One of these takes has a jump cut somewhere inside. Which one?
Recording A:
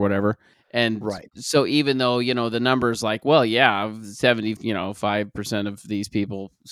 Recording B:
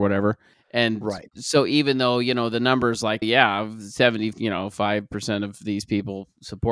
B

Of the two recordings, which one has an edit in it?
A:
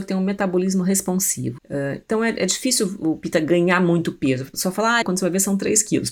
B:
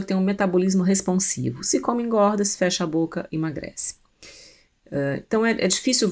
A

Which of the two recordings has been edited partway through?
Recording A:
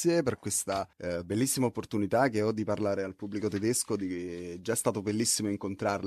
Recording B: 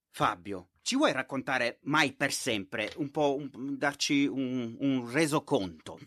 A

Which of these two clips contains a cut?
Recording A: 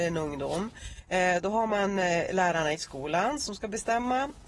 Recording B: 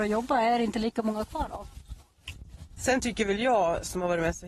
B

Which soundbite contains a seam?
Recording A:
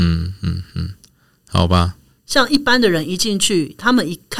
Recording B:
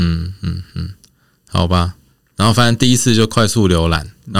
A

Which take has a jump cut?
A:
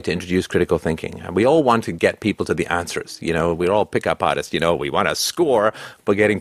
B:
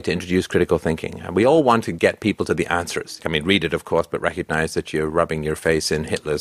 B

